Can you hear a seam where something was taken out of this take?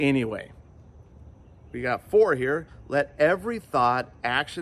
no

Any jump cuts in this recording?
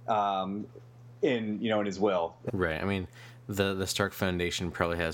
yes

